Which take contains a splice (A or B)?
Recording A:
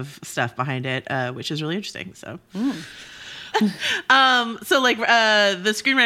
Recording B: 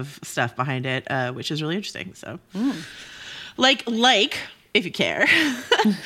A